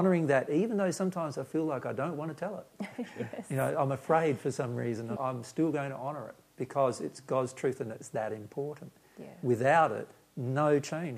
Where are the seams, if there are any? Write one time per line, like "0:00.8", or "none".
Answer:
0:05.2